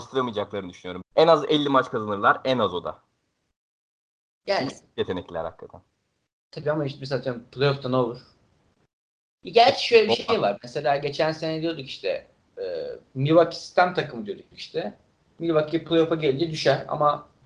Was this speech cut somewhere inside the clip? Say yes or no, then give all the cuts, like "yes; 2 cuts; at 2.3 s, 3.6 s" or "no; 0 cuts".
yes; 1 cut; at 1.0 s